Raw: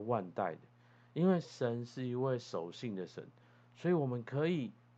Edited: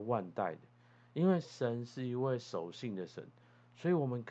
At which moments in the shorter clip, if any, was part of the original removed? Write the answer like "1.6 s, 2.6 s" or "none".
none